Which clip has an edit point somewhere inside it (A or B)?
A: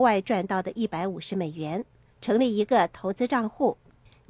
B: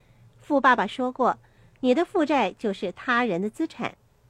A